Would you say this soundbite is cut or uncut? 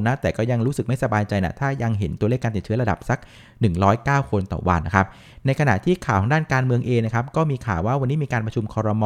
cut